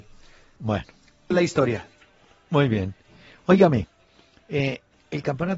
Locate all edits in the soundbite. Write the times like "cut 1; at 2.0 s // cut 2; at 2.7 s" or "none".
cut 1; at 1.3 s